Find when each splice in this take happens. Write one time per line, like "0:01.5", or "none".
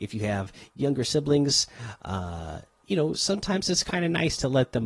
none